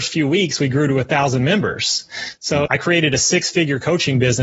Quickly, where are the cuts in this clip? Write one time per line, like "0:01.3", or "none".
0:02.7